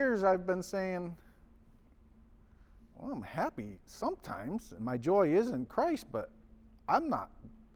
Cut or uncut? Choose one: uncut